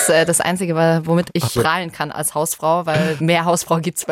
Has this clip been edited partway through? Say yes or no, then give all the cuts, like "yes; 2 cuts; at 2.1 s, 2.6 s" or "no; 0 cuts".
yes; 1 cut; at 1.6 s